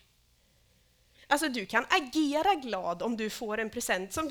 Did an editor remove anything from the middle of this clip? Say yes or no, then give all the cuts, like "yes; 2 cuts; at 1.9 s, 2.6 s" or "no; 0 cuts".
yes; 1 cut; at 1.2 s